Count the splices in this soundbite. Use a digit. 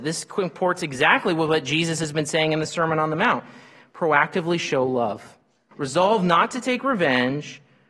1